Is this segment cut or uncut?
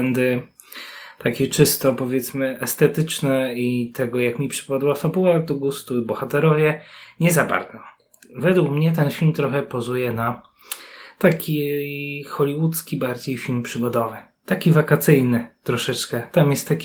uncut